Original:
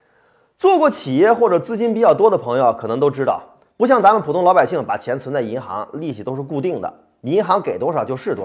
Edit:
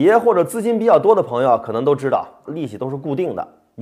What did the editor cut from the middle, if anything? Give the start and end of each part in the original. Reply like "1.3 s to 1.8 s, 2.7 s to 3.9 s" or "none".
3.6 s to 5.9 s